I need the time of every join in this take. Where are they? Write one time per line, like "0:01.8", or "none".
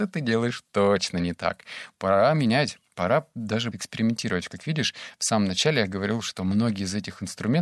0:03.7